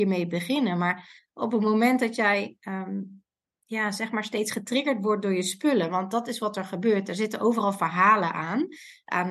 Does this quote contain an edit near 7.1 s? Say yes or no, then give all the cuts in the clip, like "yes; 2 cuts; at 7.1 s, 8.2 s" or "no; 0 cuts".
no; 0 cuts